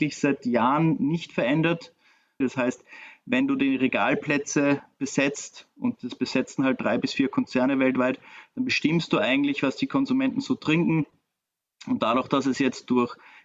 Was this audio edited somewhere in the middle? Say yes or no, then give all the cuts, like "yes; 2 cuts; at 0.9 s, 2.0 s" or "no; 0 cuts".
yes; 1 cut; at 2.4 s